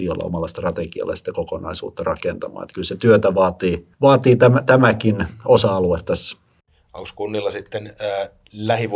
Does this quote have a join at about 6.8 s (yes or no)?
no